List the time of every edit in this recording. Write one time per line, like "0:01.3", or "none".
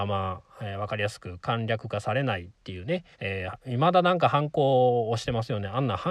0:03.1